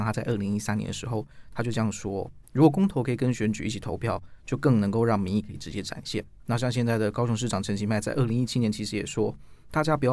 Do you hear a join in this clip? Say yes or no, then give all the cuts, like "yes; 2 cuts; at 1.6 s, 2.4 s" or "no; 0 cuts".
no; 0 cuts